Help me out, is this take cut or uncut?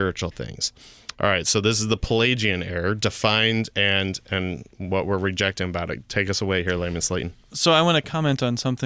uncut